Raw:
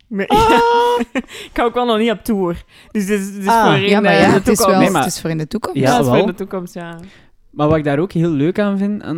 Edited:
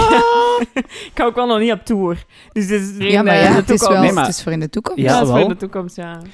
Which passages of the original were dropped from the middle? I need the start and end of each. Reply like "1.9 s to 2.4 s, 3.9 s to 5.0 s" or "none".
3.4 s to 3.8 s

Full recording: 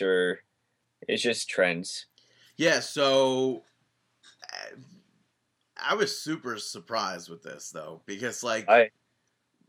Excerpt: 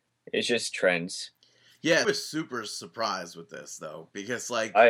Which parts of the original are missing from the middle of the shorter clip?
2.8 s to 6.0 s

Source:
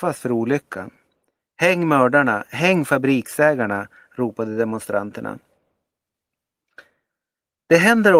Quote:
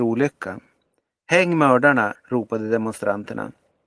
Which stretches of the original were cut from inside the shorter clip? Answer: 2.5 s to 4.0 s

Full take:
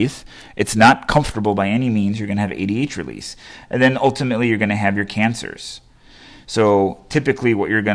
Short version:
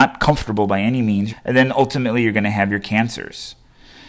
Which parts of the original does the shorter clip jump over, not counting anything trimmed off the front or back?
2.2 s to 3.6 s

